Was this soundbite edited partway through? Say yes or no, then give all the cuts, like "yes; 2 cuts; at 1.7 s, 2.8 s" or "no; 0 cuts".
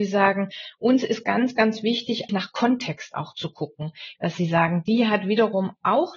yes; 2 cuts; at 2.3 s, 4.2 s